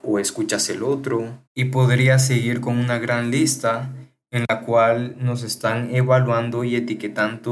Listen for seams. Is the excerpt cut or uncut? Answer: cut